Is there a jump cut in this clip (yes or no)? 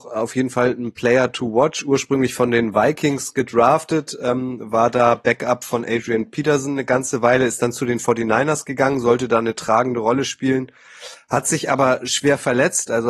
no